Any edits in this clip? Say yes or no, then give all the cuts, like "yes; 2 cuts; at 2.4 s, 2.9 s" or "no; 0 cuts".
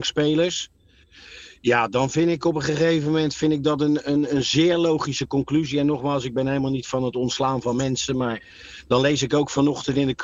no; 0 cuts